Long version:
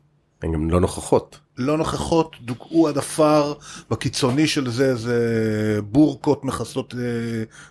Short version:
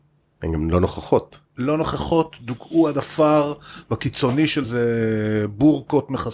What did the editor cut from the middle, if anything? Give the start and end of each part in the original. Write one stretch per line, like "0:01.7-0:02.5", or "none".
0:04.6-0:05.0